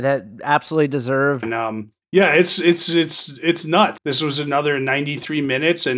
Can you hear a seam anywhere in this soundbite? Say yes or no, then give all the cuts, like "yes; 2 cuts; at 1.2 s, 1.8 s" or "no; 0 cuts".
yes; 2 cuts; at 1.4 s, 4.0 s